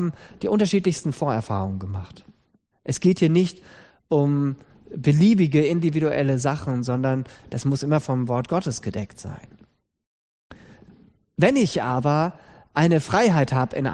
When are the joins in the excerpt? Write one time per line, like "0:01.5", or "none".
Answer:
0:02.7